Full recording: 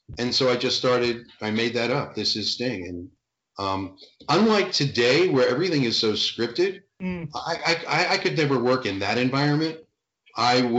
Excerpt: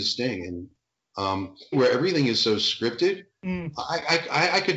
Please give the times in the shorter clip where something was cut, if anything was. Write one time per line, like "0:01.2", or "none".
0:01.7